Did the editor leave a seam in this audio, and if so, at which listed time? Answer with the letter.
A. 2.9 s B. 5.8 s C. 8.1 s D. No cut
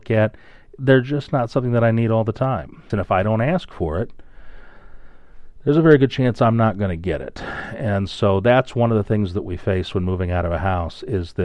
A